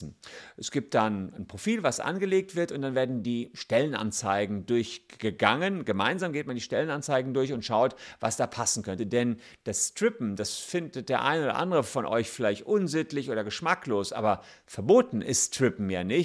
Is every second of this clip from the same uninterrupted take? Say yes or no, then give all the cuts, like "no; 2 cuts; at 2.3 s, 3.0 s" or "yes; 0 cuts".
no; 1 cut; at 9.0 s